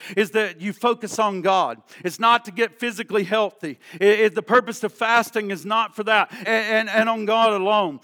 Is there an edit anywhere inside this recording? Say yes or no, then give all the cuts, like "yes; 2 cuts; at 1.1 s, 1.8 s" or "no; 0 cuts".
yes; 1 cut; at 6.4 s